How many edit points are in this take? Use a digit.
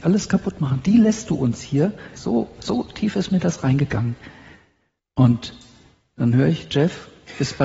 2